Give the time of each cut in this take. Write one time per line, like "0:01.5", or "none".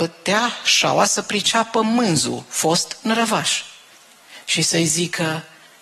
none